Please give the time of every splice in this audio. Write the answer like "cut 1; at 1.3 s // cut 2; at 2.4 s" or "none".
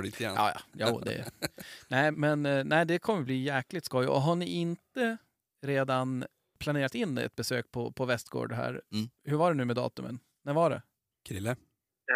cut 1; at 2.1 s